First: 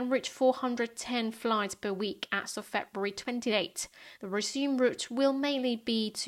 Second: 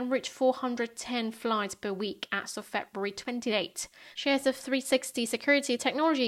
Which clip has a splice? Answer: second; 1 cut; at 4.1 s

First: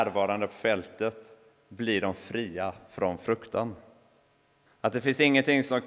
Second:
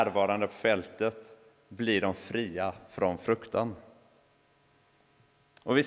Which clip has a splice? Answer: first; 1 cut; at 4.7 s

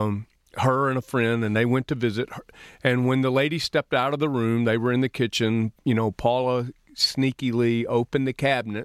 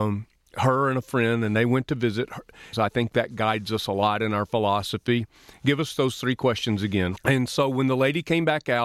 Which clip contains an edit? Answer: second; 2 cuts; at 2.7 s, 7.2 s

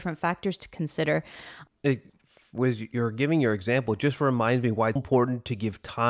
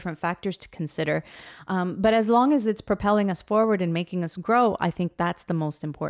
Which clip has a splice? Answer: first; 2 cuts; at 1.7 s, 5.0 s

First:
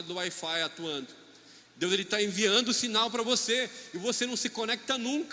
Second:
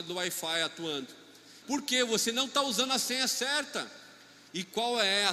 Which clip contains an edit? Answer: second; 1 cut; at 1.6 s

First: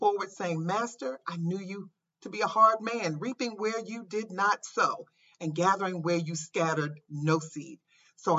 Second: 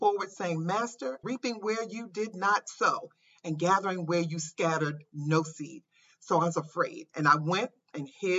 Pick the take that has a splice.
second; 1 cut; at 1.2 s

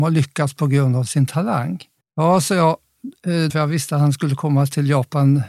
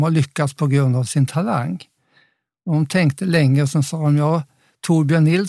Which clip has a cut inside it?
first; 2 cuts; at 2.0 s, 3.5 s

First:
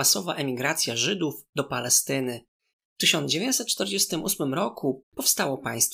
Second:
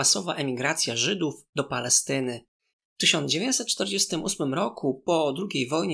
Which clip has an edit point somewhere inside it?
first; 1 cut; at 5.0 s

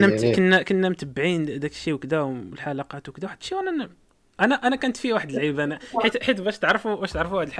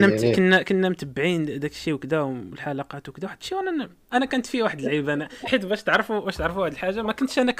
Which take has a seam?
second; 2 cuts; at 4.1 s, 5.4 s

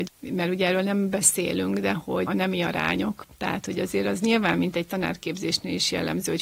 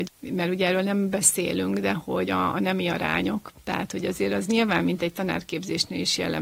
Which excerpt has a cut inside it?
first; 1 cut; at 2.3 s

